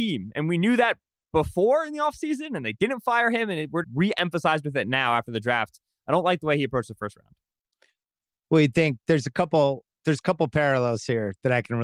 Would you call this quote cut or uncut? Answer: cut